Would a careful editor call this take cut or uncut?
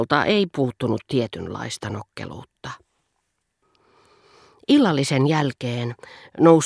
uncut